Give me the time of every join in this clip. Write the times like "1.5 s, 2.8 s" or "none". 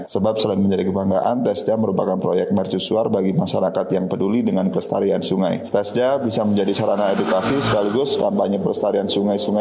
none